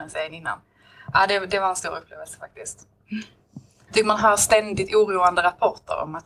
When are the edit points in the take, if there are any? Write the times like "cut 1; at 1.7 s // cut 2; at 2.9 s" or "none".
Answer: cut 1; at 3.9 s